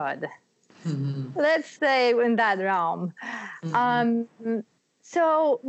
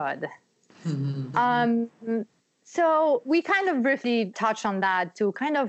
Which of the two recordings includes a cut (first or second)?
second